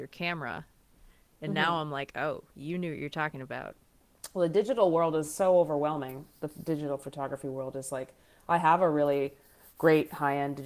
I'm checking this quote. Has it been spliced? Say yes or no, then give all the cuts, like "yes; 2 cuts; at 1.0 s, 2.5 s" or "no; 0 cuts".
no; 0 cuts